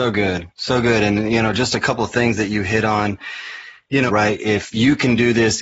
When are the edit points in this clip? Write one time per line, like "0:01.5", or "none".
0:04.1